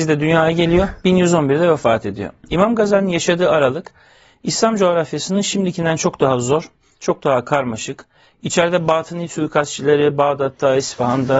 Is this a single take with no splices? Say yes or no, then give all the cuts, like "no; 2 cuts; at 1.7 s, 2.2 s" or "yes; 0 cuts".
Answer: yes; 0 cuts